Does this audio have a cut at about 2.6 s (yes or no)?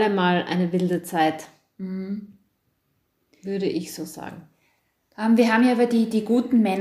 no